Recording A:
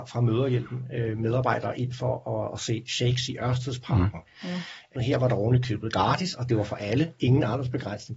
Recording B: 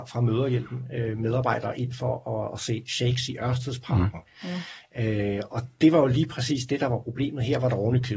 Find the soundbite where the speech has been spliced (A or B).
A